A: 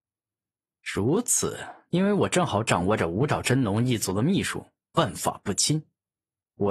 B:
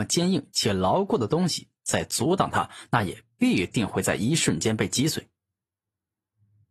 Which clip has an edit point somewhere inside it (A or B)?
A